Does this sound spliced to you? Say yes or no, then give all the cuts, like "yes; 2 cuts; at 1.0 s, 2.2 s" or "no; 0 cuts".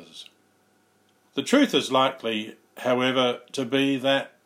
yes; 1 cut; at 1.2 s